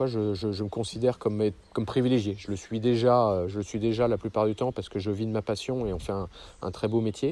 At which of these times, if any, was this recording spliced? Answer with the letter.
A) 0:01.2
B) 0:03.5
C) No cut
C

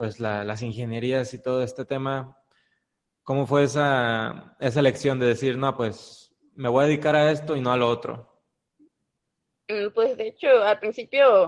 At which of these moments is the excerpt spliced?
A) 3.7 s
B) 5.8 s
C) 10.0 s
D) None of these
D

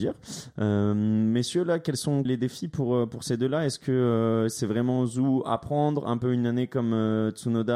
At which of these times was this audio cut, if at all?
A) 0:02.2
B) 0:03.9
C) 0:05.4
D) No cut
A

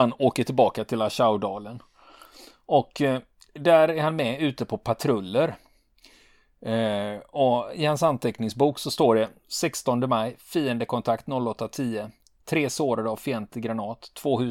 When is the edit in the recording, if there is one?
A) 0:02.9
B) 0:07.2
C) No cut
C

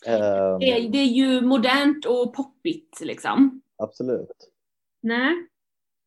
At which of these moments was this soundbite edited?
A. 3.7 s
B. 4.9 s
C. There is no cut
B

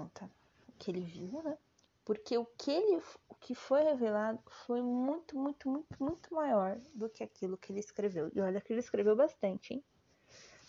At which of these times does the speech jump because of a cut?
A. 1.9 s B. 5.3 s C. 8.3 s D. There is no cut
A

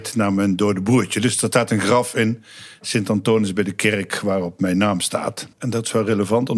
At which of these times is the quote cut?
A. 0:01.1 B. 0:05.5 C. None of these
B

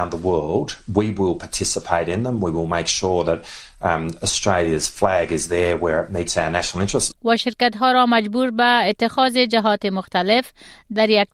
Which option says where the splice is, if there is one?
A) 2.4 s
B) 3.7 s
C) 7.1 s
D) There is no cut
C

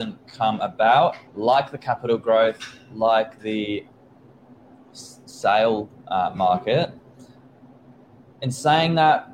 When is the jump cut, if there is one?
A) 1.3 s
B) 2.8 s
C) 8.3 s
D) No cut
A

